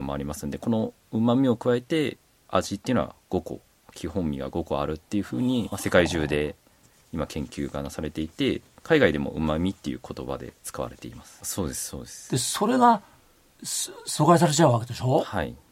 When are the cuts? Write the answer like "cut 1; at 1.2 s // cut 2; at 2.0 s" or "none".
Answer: cut 1; at 5.7 s // cut 2; at 11.4 s

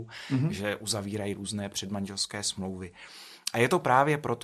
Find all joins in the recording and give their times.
none

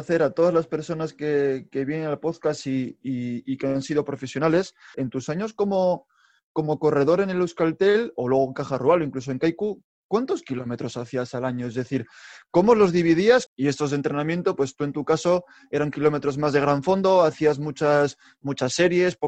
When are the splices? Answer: cut 1; at 4.9 s // cut 2; at 13.5 s

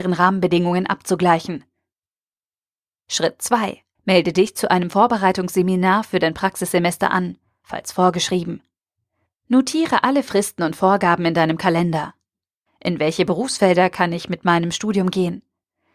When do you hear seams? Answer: cut 1; at 3.9 s // cut 2; at 12.7 s

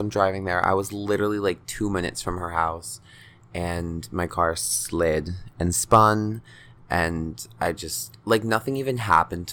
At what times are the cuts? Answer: none

